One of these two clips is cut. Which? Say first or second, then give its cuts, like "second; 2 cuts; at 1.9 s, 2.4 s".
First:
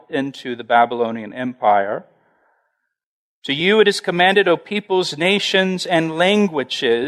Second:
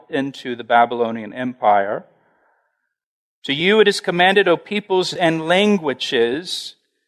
second; 1 cut; at 5.2 s